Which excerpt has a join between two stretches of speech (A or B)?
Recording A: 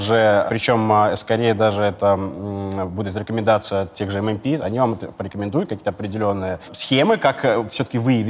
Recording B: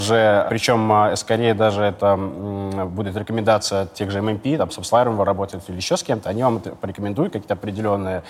A